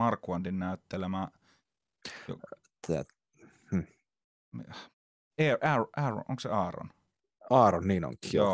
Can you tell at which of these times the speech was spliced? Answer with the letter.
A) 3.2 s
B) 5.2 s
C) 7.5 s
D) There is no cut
D